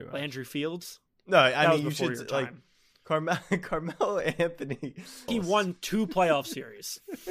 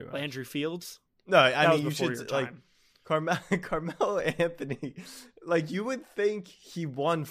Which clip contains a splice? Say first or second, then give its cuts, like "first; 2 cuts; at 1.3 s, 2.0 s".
first; 1 cut; at 5.3 s